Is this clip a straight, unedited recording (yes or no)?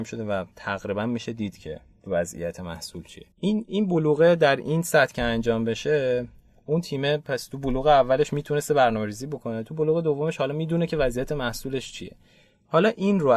no